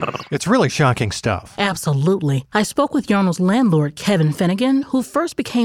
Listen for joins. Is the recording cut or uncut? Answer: uncut